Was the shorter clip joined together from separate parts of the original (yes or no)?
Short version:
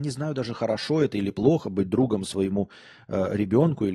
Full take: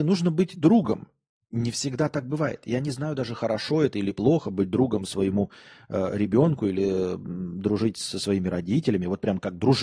no